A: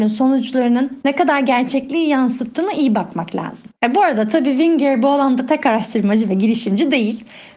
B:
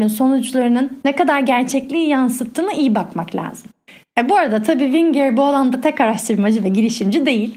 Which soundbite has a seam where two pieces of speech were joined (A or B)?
A